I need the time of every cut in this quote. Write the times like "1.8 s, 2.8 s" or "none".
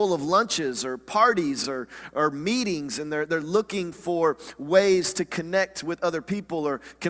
none